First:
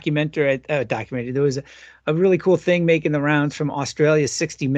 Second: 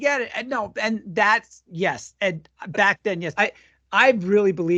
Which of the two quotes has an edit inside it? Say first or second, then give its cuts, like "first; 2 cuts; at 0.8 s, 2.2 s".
second; 1 cut; at 3.4 s